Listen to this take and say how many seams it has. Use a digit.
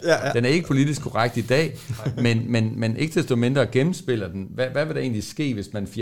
0